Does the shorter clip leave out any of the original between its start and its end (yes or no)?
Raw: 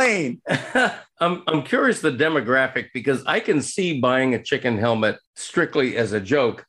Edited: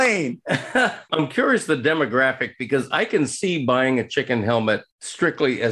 yes